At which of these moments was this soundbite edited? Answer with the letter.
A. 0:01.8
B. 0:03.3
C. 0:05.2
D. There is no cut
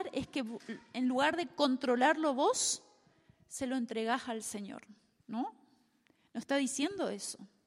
C